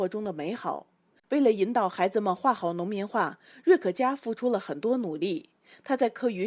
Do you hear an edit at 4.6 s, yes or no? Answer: no